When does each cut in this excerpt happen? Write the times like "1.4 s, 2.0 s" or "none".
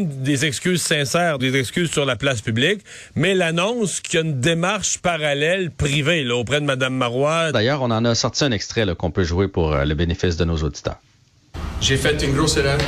1.4 s, 7.5 s